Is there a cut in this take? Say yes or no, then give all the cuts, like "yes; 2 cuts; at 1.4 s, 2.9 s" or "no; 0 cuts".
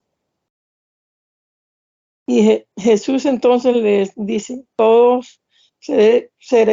yes; 2 cuts; at 2.7 s, 4.7 s